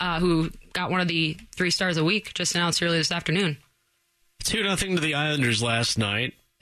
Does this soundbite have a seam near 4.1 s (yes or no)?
no